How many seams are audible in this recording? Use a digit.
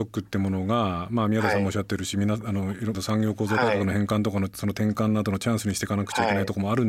2